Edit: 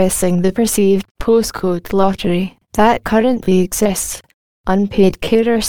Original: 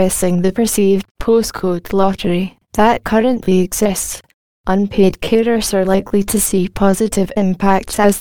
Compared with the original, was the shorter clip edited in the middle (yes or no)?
no